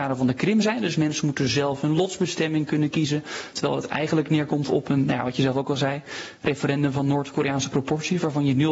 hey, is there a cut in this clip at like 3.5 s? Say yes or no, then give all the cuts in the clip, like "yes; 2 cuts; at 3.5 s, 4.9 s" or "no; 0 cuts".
yes; 1 cut; at 3.5 s